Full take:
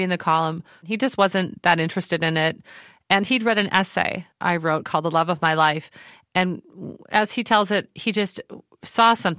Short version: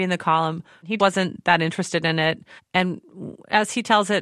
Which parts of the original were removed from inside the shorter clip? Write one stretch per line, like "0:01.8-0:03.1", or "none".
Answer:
0:01.0-0:01.2
0:02.7-0:06.2